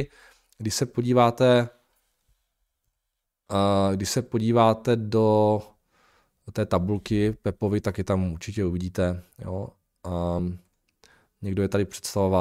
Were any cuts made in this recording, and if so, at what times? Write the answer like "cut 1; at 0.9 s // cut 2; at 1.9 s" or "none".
none